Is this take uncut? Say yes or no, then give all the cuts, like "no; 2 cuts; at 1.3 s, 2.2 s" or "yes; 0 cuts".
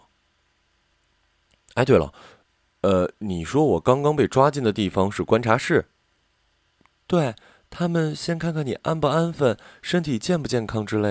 yes; 0 cuts